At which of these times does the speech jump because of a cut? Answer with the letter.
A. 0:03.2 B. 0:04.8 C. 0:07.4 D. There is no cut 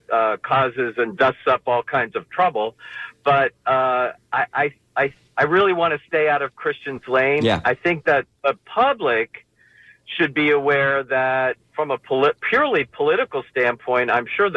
D